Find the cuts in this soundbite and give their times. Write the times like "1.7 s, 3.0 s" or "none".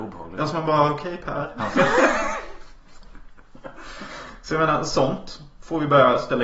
none